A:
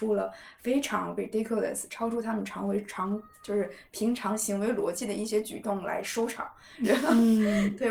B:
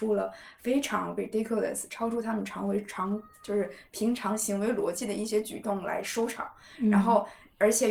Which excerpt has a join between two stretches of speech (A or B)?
A